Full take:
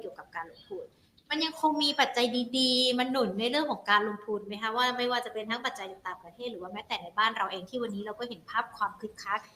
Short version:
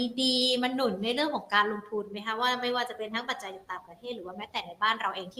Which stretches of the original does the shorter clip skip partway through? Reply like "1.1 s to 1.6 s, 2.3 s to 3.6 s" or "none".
none